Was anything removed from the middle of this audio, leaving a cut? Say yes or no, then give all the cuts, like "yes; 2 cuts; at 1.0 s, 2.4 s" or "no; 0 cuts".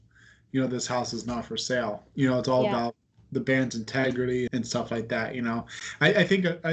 yes; 1 cut; at 4.5 s